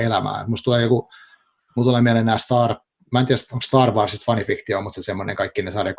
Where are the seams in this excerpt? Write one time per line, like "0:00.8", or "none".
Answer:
none